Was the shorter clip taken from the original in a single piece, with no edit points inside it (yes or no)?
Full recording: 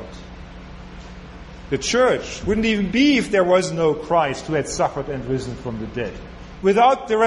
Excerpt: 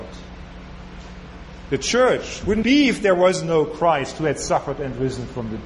no